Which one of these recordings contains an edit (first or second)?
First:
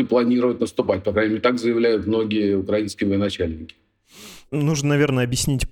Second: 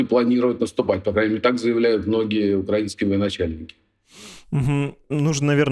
first